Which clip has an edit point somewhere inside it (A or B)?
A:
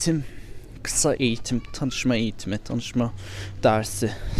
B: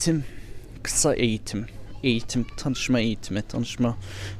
A